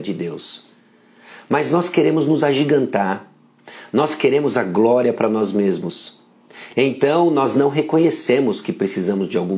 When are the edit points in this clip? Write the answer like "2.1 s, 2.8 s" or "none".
none